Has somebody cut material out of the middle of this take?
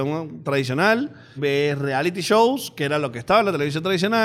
yes; 1 cut; at 1.4 s

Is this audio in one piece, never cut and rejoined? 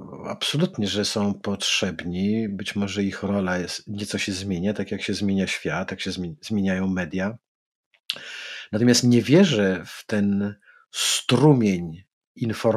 yes; 0 cuts

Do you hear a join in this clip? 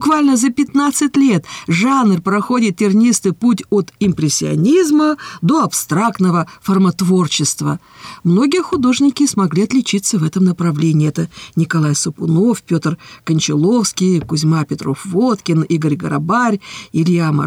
no; 0 cuts

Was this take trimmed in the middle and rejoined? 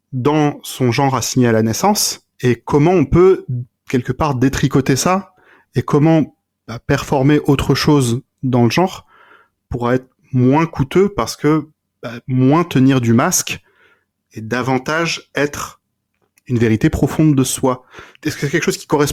yes; 1 cut; at 2.3 s

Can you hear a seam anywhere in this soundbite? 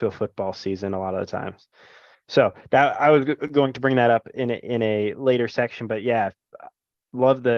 no; 0 cuts

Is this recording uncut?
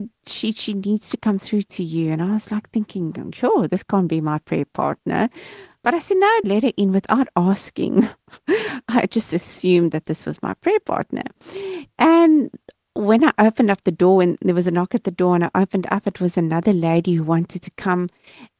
no; 1 cut; at 6.4 s

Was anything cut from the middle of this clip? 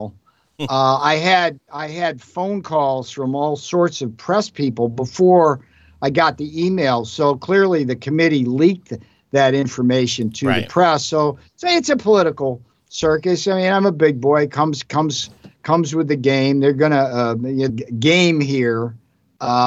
yes; 1 cut; at 17.7 s

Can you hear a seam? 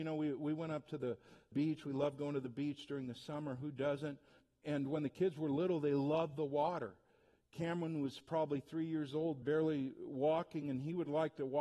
no; 0 cuts

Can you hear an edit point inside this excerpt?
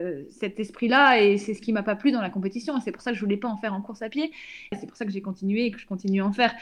yes; 1 cut; at 4.7 s

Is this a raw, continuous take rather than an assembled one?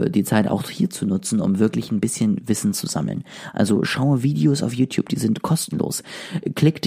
yes; 0 cuts

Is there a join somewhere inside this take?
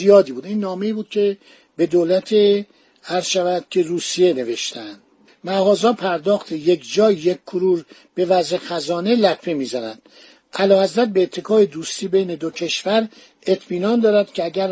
no; 0 cuts

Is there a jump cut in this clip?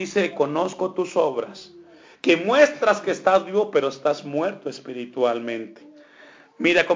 no; 0 cuts

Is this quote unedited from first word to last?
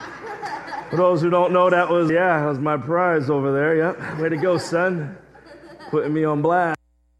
no; 1 cut; at 2.1 s

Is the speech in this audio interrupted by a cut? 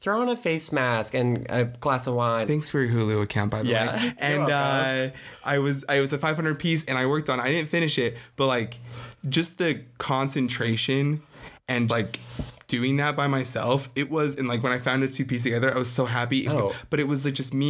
yes; 3 cuts; at 2.5 s, 11.9 s, 16.5 s

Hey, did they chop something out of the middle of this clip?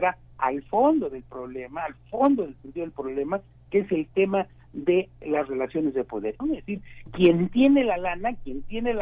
yes; 1 cut; at 6.4 s

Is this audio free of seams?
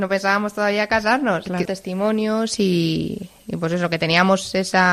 no; 1 cut; at 1.7 s

